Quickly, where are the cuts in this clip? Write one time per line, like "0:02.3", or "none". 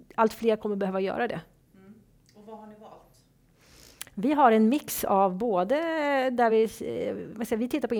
none